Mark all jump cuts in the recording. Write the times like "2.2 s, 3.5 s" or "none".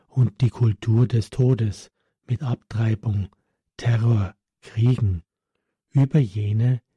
none